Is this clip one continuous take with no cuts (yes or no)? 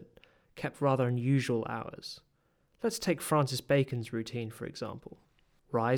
yes